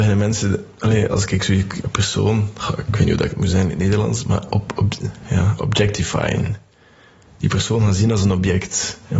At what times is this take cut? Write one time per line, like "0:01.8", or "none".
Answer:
none

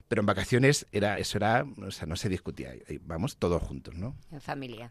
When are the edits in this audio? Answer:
none

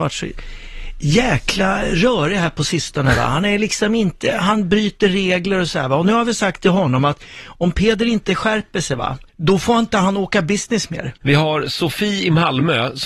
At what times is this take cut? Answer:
0:09.3
0:11.2

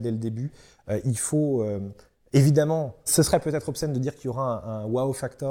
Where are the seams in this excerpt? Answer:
none

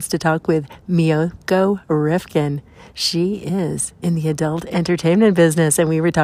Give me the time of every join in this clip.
none

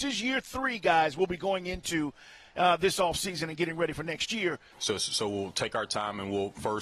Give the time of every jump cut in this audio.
0:04.7

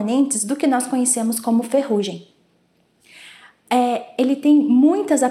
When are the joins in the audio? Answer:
none

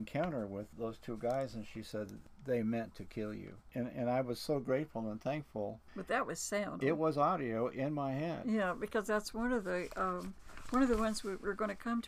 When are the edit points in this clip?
0:06.8

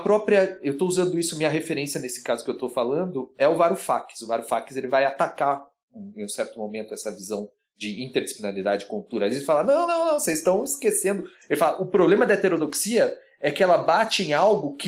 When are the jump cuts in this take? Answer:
none

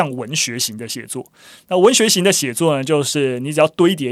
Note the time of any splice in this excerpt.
none

